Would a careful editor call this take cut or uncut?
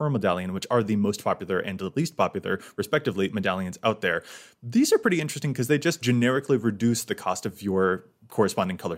uncut